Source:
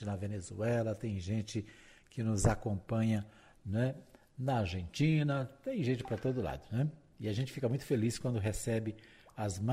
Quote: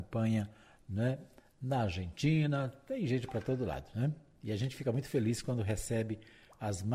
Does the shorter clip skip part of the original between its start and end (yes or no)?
no